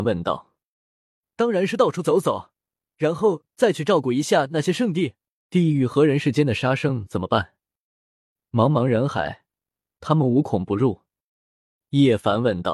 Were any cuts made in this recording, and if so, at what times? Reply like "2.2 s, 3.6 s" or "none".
5.5 s